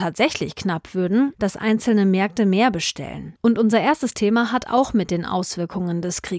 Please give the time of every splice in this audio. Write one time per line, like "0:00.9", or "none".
0:01.3
0:03.4

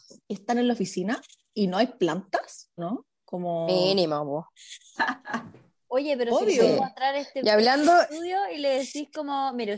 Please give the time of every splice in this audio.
0:02.8

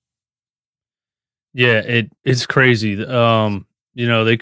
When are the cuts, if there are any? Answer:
0:02.2

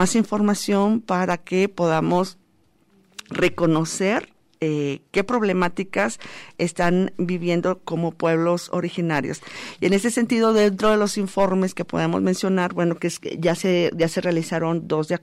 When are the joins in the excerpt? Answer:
none

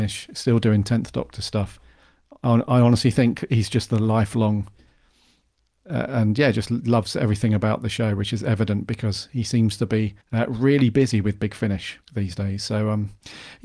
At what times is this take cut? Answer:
0:10.2
0:12.0

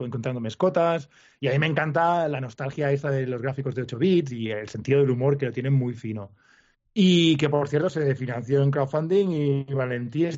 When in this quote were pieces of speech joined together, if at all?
none

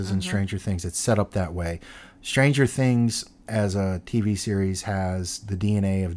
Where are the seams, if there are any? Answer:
none

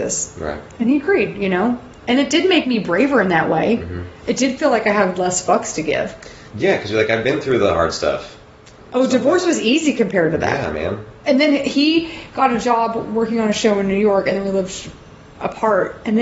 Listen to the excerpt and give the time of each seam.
0:06.5
0:11.2

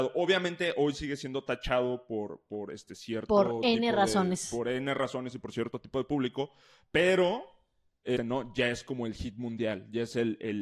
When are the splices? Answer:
0:08.2

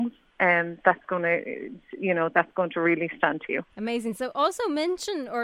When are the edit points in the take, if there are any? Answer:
0:03.7

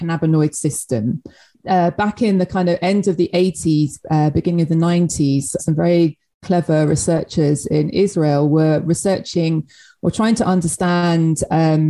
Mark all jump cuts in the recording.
0:05.6

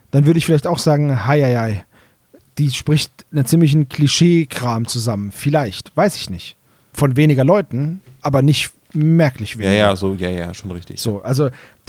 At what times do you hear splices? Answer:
0:06.9

